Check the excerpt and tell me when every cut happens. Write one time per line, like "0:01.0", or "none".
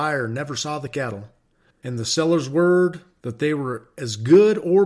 0:01.7